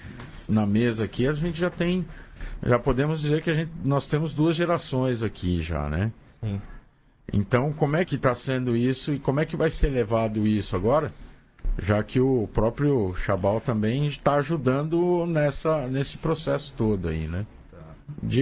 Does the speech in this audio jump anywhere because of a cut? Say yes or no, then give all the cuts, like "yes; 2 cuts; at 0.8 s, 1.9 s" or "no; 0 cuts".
yes; 1 cut; at 8.0 s